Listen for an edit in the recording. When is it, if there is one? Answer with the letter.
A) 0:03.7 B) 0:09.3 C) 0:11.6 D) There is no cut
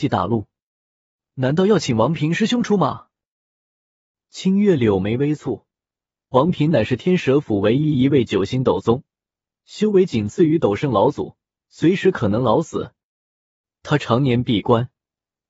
C